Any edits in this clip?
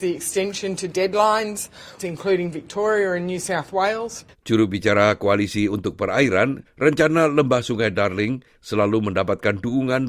yes; 3 cuts; at 2.0 s, 4.3 s, 6.6 s

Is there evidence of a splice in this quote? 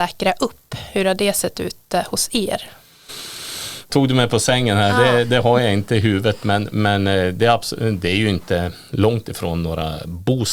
yes; 1 cut; at 3.9 s

